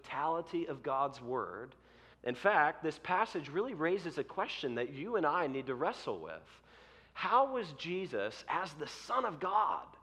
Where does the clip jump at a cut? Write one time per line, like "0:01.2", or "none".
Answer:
0:02.1